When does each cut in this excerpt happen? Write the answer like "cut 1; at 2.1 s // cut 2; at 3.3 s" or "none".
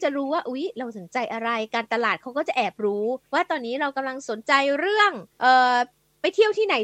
cut 1; at 3.2 s // cut 2; at 5.3 s